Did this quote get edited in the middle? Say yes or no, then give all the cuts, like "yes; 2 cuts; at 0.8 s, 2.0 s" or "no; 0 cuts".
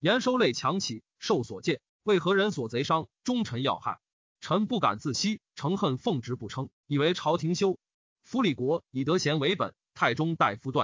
yes; 1 cut; at 1.9 s